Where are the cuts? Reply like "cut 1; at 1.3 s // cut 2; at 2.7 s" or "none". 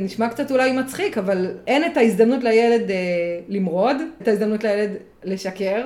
cut 1; at 1.6 s // cut 2; at 4.2 s